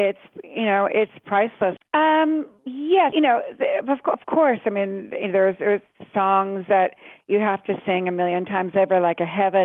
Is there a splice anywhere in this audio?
yes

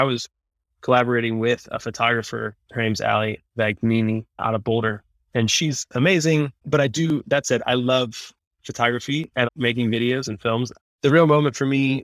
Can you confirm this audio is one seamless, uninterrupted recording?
no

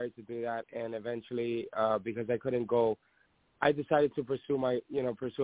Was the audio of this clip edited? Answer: no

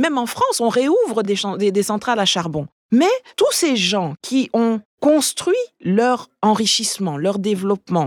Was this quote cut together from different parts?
no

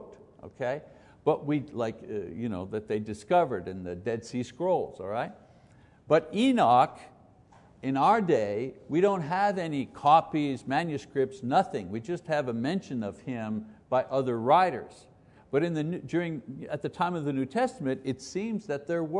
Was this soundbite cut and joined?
no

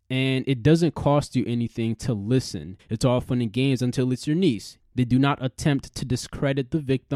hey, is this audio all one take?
no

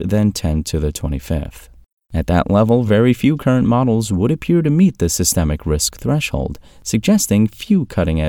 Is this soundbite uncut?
yes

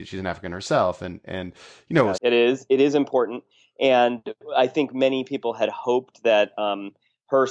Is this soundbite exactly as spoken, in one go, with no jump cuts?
no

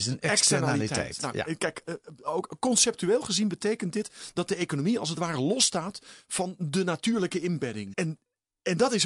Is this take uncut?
no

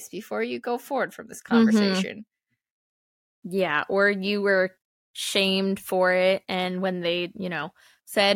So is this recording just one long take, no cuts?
yes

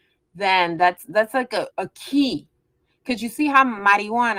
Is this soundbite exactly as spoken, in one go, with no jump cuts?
no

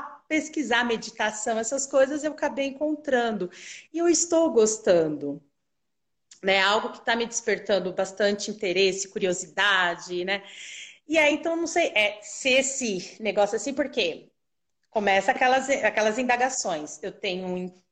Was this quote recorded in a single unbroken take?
yes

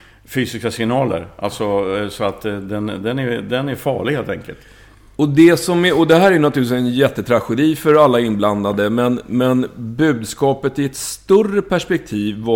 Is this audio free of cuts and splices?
yes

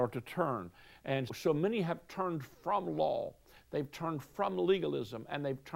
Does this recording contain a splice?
yes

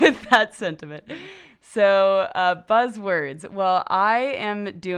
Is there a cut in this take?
no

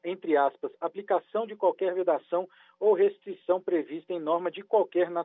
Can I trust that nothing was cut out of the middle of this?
yes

